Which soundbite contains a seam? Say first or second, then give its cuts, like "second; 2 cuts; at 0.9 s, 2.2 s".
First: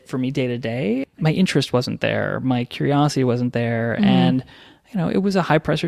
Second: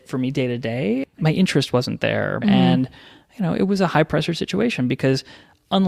second; 1 cut; at 2.4 s